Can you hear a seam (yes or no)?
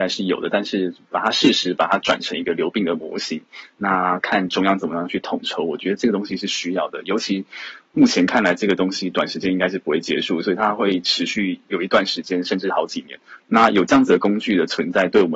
no